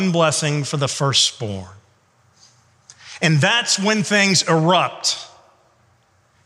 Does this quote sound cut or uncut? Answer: uncut